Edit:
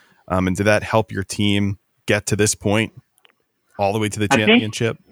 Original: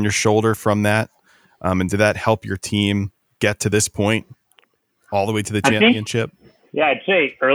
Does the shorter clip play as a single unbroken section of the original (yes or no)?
yes